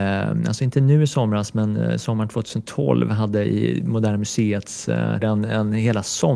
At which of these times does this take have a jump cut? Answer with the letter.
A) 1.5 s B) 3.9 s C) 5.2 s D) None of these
C